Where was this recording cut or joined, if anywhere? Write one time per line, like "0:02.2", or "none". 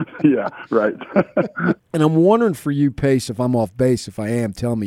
0:01.8
0:03.3